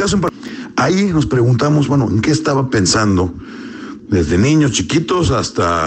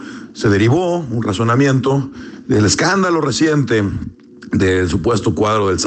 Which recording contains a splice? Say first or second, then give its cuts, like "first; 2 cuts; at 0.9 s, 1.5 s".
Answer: first; 1 cut; at 4.0 s